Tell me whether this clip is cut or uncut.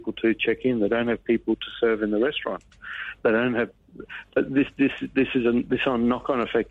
uncut